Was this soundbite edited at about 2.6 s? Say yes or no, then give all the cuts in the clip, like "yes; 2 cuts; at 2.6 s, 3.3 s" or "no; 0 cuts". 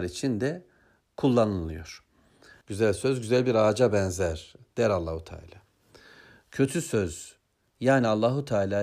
yes; 1 cut; at 2.6 s